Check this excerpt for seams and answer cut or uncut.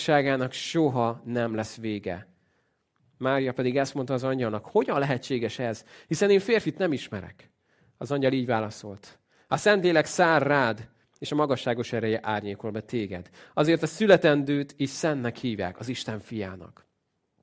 uncut